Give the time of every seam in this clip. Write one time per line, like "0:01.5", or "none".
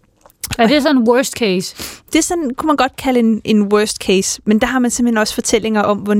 none